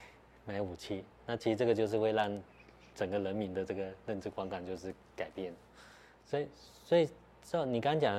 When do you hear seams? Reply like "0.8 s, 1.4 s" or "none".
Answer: none